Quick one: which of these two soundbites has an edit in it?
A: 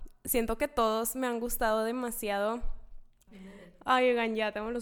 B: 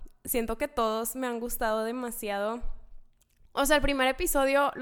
A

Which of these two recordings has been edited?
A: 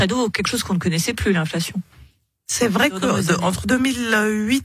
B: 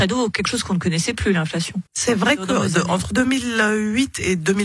B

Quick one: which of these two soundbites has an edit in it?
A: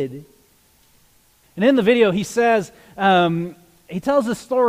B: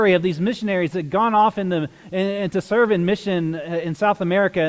A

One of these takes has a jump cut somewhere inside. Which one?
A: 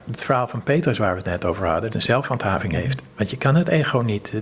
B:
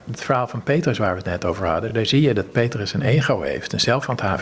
A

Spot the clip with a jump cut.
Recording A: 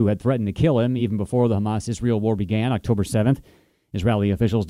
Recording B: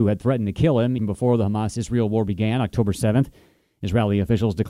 B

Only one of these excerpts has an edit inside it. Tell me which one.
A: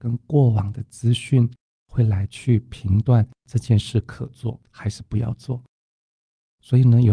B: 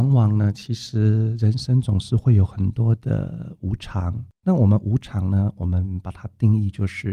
B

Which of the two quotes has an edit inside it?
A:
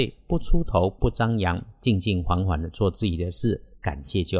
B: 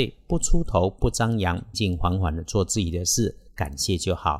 B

